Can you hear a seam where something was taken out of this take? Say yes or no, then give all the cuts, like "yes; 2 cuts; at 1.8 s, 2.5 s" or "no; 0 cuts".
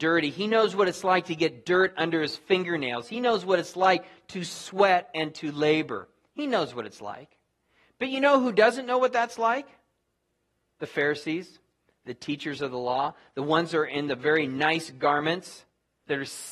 no; 0 cuts